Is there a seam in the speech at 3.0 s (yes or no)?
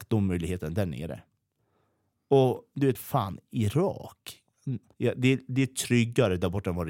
yes